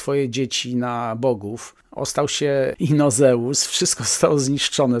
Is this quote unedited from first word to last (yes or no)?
no